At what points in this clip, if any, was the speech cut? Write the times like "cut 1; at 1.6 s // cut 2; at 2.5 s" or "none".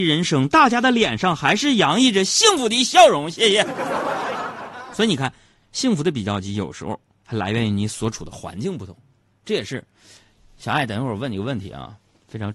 none